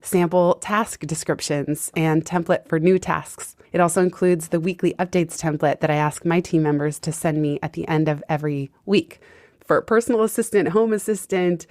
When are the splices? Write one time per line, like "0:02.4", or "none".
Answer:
0:03.6
0:09.5